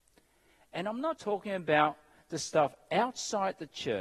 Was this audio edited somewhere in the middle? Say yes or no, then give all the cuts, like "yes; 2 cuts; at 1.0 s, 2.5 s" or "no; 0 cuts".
yes; 1 cut; at 1.2 s